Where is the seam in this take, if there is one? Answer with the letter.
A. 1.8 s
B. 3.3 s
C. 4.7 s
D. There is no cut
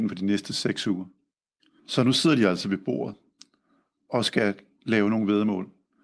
A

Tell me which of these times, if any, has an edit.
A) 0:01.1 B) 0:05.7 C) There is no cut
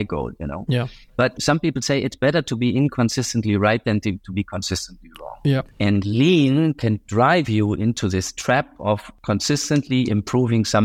B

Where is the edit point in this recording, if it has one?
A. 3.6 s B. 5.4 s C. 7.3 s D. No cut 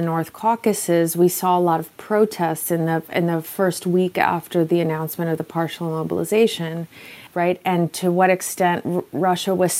C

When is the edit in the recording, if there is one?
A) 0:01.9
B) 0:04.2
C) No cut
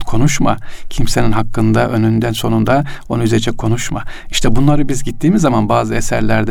C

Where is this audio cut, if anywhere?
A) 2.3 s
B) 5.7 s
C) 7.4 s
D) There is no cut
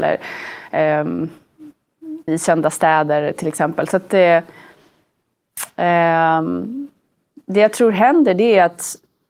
A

